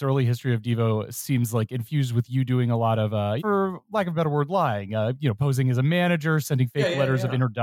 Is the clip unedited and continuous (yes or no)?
no